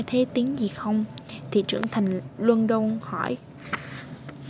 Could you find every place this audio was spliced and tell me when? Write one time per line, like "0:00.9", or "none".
0:02.4